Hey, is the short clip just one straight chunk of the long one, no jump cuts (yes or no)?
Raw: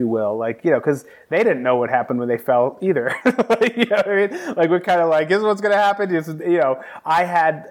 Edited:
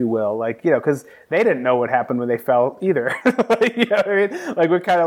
yes